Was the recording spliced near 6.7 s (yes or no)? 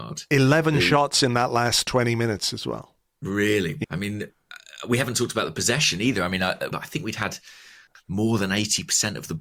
yes